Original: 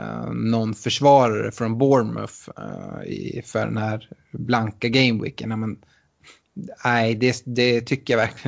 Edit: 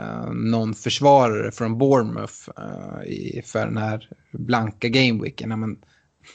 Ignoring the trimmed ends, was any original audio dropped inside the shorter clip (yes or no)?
no